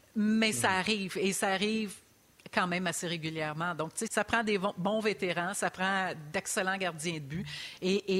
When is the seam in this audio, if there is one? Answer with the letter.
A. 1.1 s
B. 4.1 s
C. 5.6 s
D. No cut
B